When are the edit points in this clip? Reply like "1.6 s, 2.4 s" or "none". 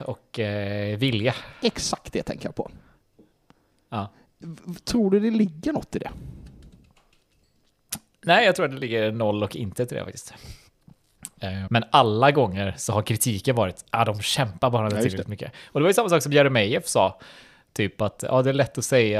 11.7 s